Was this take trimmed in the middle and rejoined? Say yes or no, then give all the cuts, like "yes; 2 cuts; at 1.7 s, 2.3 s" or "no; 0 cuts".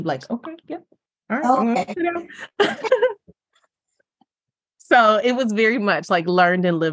no; 0 cuts